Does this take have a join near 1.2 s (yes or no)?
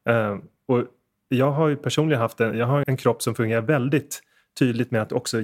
no